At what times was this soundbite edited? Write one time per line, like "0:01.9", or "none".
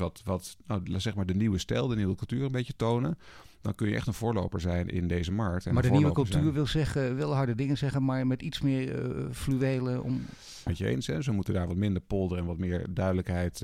0:10.7